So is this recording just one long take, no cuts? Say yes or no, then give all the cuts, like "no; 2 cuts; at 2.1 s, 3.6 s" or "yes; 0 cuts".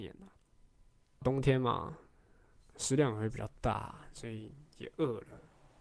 no; 1 cut; at 1.2 s